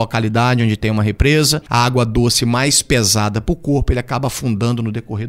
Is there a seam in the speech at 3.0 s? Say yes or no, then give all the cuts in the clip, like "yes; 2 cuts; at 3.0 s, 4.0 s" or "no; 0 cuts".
no; 1 cut; at 1.6 s